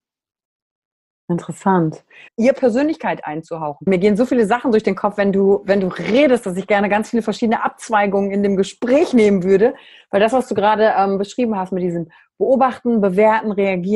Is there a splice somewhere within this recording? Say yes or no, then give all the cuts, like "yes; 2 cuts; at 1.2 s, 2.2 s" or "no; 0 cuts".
yes; 2 cuts; at 2.3 s, 3.9 s